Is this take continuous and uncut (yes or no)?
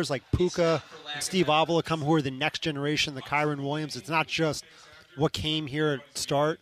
yes